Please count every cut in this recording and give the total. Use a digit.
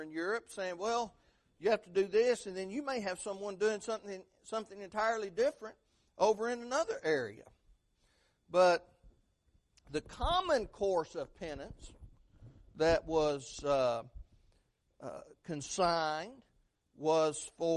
0